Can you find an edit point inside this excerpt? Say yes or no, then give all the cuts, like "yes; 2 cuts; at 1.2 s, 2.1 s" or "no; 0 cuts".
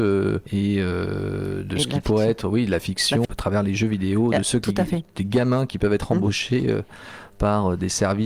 yes; 1 cut; at 3.2 s